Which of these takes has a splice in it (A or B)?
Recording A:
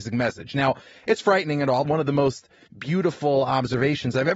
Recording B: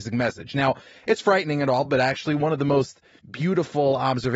A